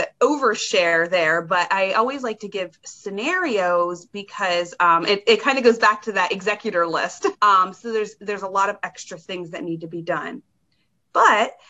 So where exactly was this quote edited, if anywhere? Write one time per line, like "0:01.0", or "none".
0:07.3